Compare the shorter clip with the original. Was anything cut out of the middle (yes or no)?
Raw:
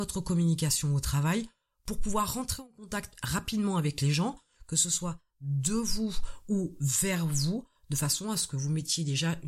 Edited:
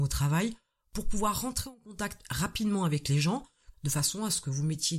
yes